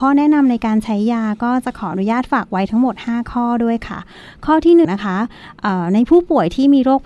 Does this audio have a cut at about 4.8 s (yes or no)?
yes